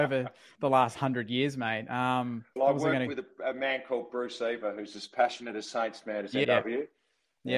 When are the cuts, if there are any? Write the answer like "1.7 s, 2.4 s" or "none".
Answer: 2.6 s, 6.4 s